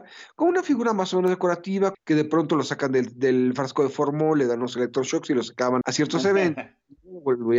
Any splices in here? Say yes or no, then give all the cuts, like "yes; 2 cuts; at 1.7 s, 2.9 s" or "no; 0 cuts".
yes; 2 cuts; at 1.9 s, 5.8 s